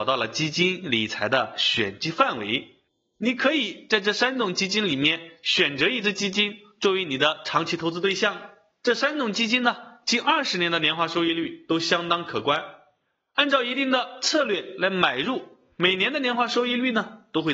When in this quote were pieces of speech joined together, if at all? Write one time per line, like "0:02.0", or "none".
none